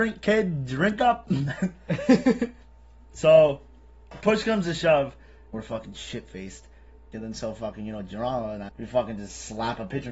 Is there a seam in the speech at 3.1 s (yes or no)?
no